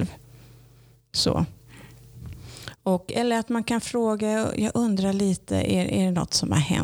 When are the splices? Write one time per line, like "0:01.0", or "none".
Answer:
none